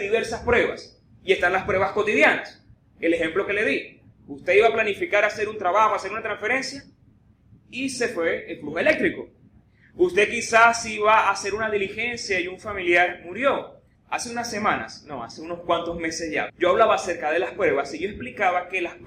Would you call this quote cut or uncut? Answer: cut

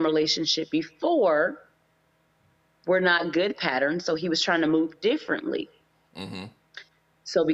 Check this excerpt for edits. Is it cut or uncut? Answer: uncut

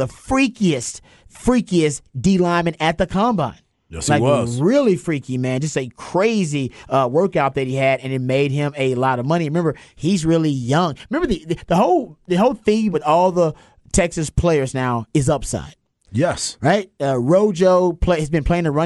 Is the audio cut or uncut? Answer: cut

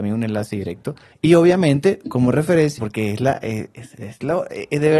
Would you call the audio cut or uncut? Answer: cut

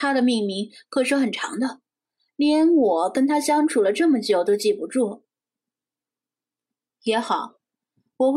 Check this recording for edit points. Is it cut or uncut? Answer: uncut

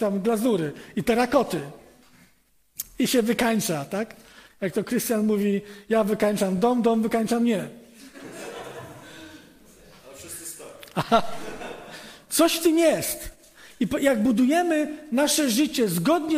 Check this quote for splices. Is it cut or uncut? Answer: uncut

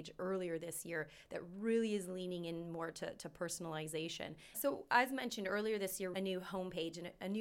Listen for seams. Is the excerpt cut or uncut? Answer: cut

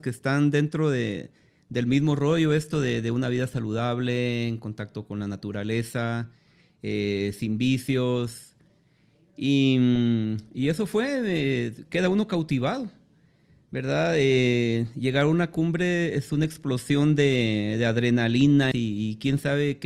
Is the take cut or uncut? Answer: cut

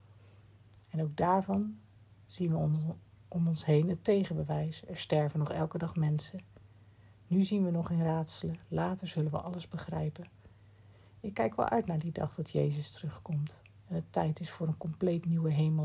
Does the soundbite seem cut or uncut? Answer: uncut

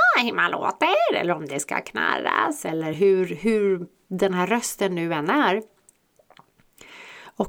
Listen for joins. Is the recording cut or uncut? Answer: uncut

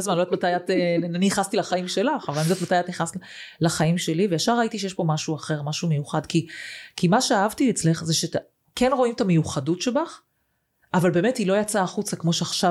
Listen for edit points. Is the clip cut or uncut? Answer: uncut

